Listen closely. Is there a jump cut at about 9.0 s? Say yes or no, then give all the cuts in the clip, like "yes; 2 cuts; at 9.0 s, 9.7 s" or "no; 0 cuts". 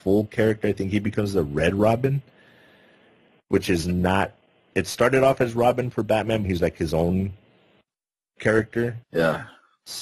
yes; 2 cuts; at 6.4 s, 9.0 s